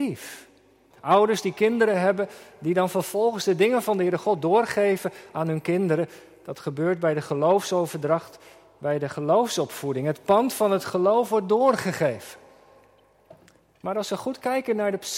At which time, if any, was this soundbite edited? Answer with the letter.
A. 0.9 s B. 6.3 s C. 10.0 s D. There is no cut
A